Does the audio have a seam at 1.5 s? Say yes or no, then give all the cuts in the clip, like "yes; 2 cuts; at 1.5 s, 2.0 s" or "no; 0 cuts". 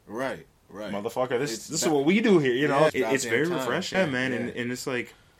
no; 2 cuts; at 2.9 s, 3.9 s